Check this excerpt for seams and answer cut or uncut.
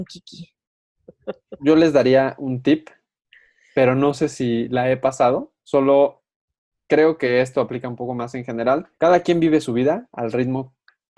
cut